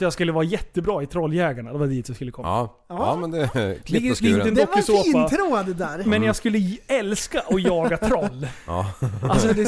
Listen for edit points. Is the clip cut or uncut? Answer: uncut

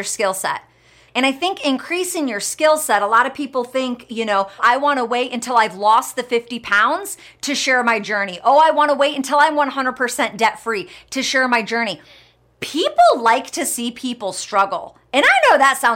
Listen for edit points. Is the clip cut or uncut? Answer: cut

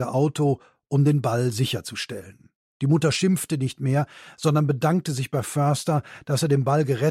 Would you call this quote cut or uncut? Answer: cut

